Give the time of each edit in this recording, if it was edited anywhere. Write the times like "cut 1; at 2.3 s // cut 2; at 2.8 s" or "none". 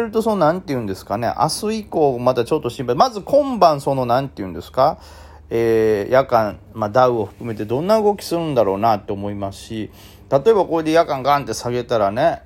none